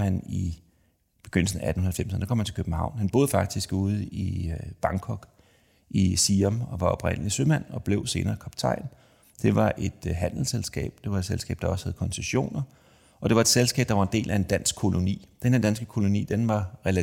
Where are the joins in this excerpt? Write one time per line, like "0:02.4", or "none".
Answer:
0:09.2